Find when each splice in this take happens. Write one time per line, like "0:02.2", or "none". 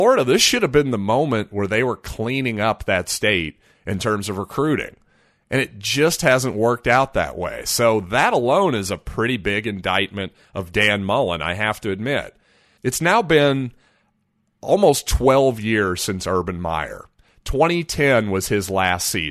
0:12.8